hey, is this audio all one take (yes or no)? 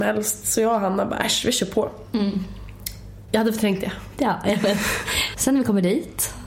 no